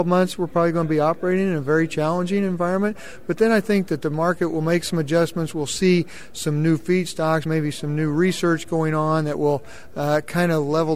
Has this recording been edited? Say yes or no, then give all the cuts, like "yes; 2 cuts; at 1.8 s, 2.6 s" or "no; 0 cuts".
no; 0 cuts